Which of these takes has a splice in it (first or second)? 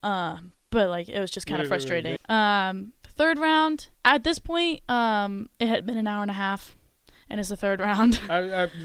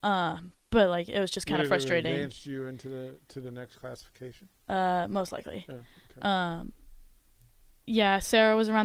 first